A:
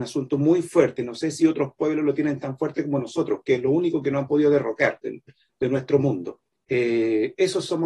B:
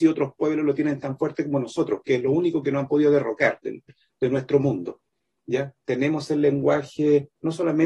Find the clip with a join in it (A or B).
A